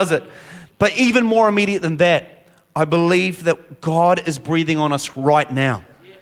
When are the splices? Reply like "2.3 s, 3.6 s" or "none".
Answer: none